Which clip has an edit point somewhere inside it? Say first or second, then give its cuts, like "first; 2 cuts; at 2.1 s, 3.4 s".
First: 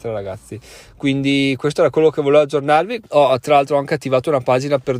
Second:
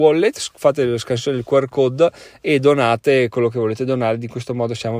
first; 1 cut; at 3.0 s